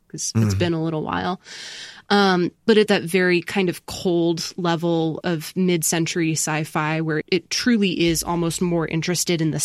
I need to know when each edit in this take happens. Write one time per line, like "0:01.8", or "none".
0:02.9
0:05.2
0:07.2